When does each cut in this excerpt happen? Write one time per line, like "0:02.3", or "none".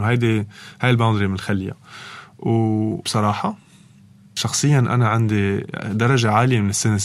0:03.0